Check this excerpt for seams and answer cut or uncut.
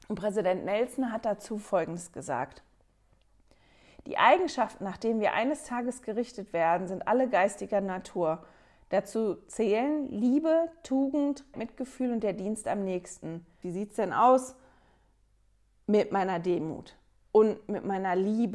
cut